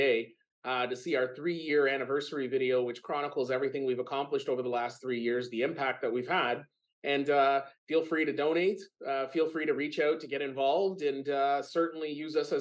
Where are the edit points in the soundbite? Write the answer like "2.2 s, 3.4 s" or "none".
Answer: 7.8 s